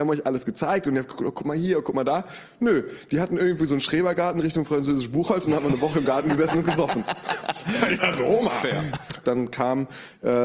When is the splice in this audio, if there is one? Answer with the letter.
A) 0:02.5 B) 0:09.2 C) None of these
B